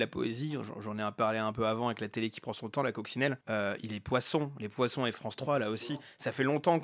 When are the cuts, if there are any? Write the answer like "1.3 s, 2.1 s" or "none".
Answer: 3.4 s

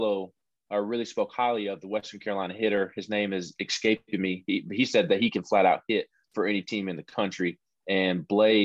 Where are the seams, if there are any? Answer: none

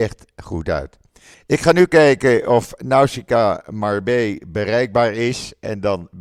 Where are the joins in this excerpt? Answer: 1.3 s

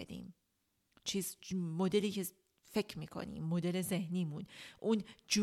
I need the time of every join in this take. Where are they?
none

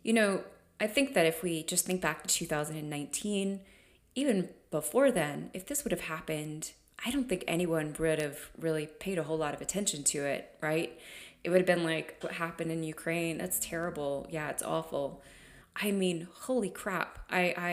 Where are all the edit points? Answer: 12.2 s, 15.6 s

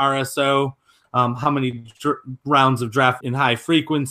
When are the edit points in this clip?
1.0 s, 3.2 s

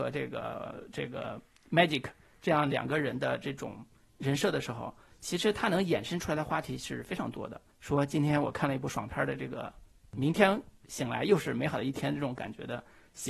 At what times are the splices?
7.7 s

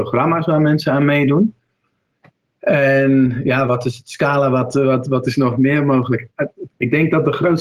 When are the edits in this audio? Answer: 6.7 s

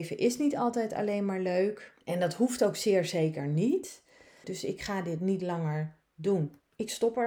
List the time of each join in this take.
2.0 s, 4.4 s

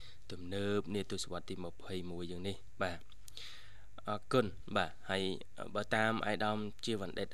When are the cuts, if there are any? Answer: none

